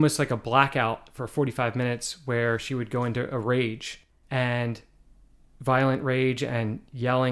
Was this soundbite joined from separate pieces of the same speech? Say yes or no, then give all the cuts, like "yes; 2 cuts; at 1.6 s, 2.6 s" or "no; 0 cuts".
no; 0 cuts